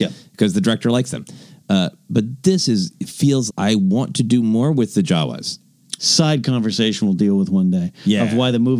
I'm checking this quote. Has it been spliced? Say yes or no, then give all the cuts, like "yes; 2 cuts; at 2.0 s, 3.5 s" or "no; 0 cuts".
yes; 2 cuts; at 3.5 s, 6.0 s